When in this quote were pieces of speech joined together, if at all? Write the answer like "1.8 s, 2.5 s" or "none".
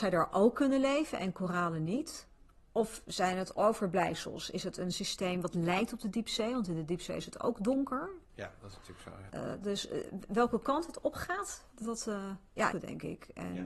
11.7 s, 12.7 s